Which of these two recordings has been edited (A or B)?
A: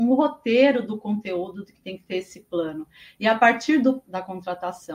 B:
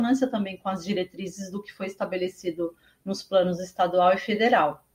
A